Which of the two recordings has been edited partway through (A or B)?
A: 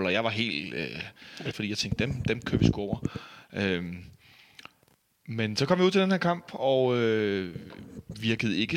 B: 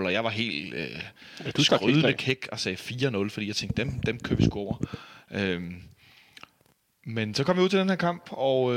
A